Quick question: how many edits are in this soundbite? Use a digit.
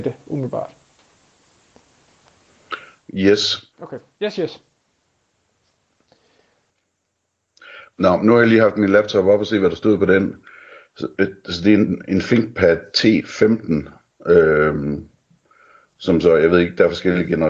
2